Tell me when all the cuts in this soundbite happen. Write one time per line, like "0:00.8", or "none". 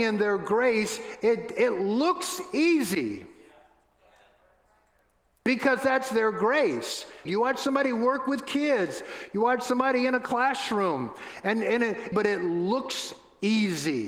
0:07.3
0:12.1